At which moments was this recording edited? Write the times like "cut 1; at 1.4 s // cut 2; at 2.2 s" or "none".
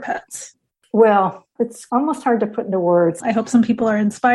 cut 1; at 3.2 s